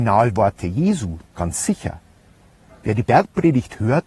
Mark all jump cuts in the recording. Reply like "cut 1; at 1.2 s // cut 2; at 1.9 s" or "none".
cut 1; at 1.2 s